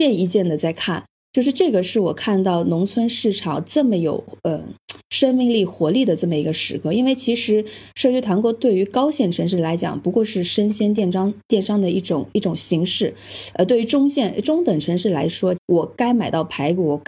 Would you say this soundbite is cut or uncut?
cut